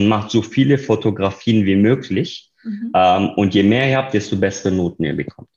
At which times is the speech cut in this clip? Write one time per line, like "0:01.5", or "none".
none